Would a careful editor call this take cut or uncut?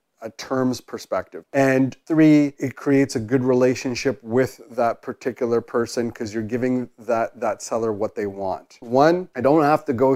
cut